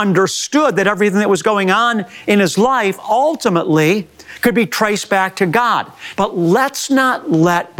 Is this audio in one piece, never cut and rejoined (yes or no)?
no